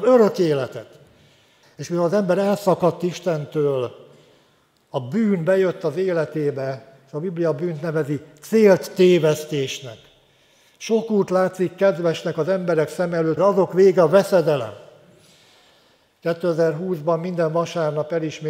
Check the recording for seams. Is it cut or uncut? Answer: cut